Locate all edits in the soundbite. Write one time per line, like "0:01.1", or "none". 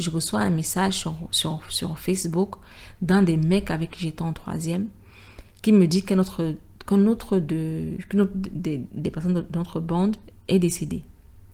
none